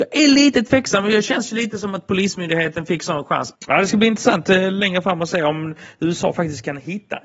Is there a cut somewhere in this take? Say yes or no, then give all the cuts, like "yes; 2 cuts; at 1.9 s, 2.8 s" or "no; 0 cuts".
yes; 1 cut; at 3.5 s